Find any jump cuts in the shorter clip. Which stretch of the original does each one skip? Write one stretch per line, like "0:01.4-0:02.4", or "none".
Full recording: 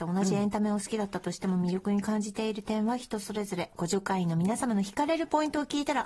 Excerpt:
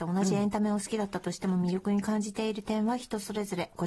none